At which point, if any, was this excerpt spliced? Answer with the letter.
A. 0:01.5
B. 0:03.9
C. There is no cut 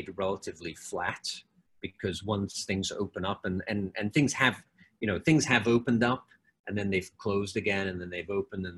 C